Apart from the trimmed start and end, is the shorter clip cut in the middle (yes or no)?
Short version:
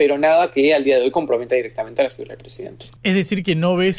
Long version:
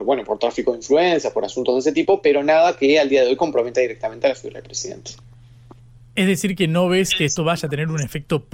yes